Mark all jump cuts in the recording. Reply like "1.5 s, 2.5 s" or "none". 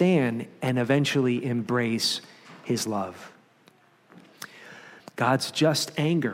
5.0 s